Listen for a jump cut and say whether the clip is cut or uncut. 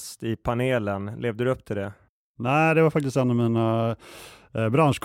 uncut